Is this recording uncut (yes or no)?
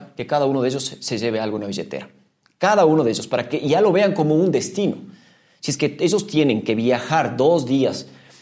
yes